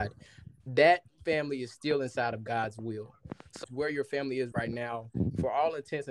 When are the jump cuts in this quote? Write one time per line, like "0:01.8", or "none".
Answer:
0:03.6